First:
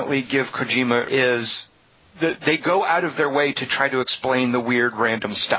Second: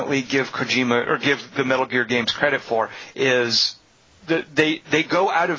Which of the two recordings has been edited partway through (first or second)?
first